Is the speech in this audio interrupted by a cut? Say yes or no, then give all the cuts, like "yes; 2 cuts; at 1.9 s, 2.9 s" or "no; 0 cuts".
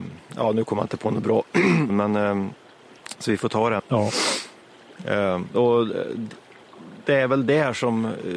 yes; 3 cuts; at 1.9 s, 3.8 s, 5.5 s